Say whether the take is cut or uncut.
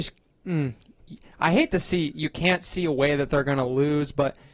uncut